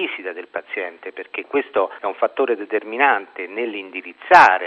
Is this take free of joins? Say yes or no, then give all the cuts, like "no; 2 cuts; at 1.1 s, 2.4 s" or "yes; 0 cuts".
yes; 0 cuts